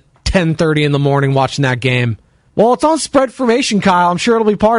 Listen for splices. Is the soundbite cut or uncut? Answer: cut